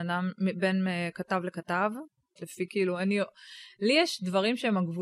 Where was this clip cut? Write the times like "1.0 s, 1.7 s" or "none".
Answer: 2.4 s